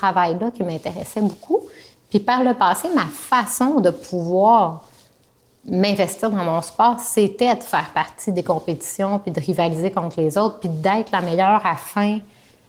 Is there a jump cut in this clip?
no; 0 cuts

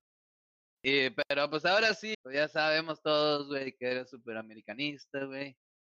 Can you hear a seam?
yes; 1 cut; at 2.1 s

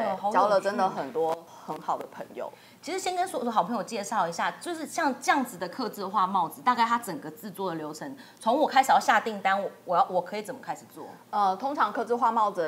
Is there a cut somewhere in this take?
no; 0 cuts

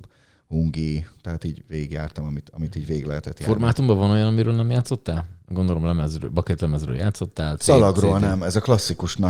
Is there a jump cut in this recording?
no; 0 cuts

